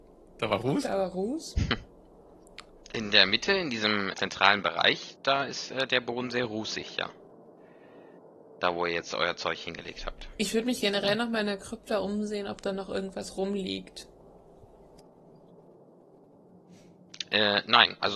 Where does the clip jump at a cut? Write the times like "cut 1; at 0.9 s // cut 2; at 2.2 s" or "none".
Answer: cut 1; at 4.1 s